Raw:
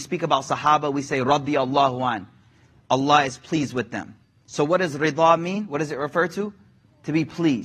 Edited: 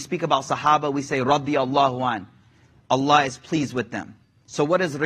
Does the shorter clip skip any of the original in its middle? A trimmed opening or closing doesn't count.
no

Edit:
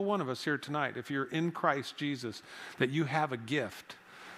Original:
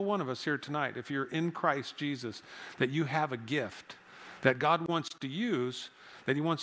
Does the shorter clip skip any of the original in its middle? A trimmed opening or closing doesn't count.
no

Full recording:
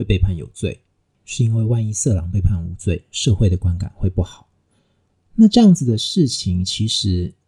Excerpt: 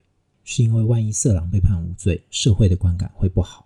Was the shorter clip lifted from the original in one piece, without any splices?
yes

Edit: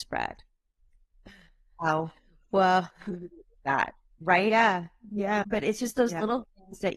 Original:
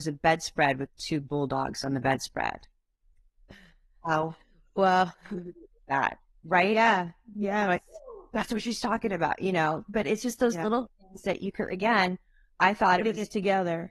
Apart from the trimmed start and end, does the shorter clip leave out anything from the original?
yes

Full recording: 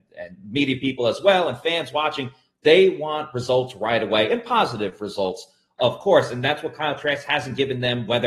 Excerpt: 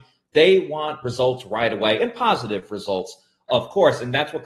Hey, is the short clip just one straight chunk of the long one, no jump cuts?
yes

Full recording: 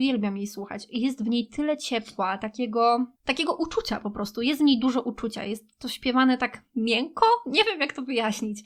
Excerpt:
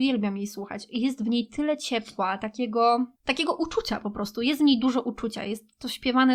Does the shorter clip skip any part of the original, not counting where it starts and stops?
no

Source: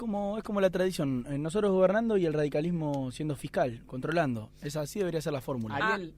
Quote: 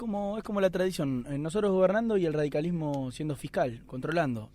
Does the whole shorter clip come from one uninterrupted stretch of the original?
yes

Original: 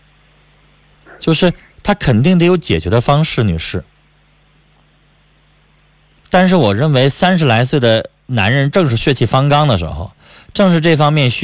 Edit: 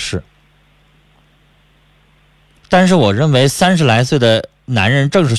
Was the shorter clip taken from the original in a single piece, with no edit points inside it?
yes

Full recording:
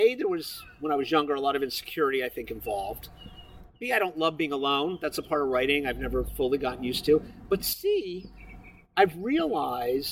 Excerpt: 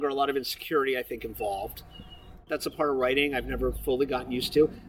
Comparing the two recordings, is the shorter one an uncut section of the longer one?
no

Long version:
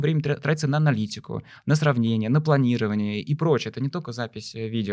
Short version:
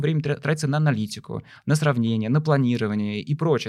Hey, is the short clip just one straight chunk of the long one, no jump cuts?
yes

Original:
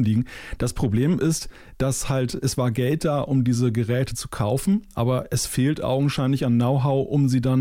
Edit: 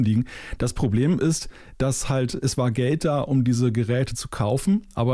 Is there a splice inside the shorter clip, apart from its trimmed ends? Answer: no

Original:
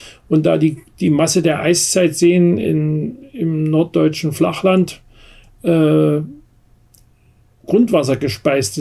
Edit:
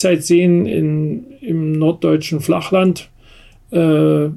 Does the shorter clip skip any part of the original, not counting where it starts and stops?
no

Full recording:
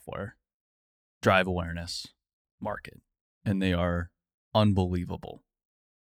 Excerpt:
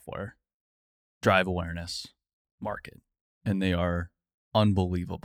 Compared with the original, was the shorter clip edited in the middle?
no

